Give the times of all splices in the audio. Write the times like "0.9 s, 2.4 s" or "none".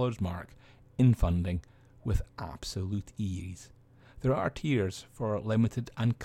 none